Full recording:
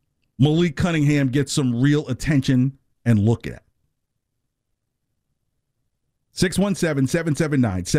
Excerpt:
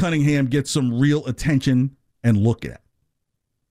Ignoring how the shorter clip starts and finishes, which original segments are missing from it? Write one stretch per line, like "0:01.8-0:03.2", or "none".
none